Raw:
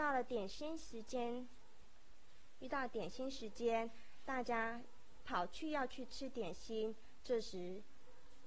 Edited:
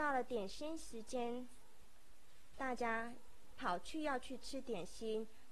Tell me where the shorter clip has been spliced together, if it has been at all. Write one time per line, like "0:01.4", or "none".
0:02.5

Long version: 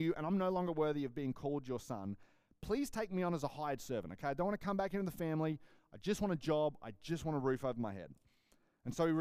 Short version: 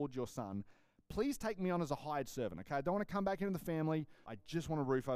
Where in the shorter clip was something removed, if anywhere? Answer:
0:04.2

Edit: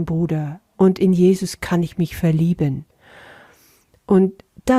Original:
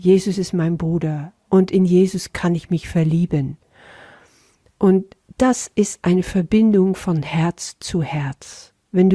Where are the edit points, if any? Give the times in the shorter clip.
none

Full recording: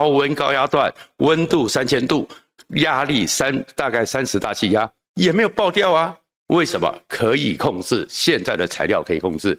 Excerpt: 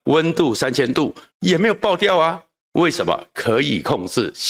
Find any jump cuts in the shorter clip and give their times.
0:01.3

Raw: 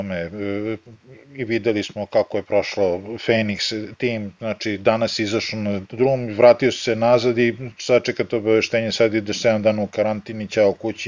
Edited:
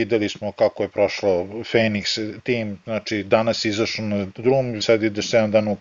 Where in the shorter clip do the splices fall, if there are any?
0:04.8

